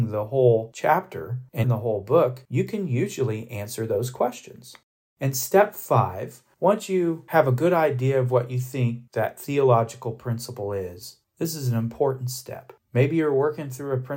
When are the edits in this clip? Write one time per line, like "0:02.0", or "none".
0:01.6
0:12.8